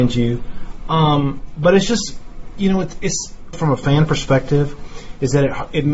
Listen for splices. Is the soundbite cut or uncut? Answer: cut